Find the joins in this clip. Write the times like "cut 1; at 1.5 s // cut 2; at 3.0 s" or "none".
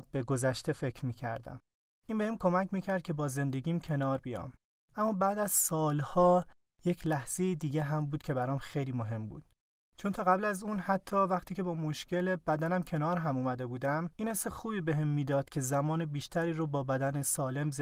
none

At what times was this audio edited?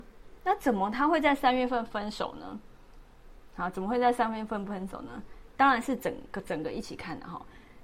cut 1; at 5.6 s

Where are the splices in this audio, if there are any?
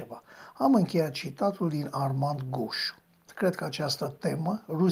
cut 1; at 3.3 s

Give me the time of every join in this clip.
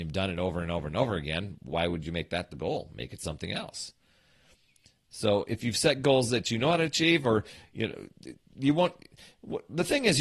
none

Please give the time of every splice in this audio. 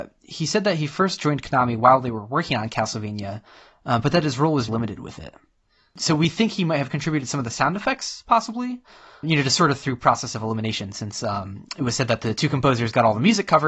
cut 1; at 4.7 s // cut 2; at 9.2 s

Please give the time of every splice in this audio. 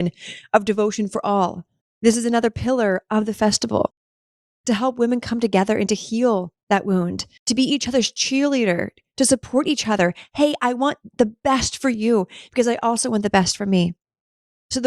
cut 1; at 1.8 s // cut 2; at 7.4 s

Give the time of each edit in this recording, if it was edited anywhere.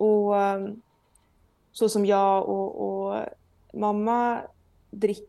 none

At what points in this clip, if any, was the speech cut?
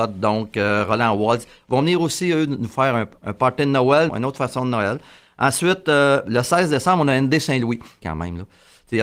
cut 1; at 4.1 s // cut 2; at 8.0 s

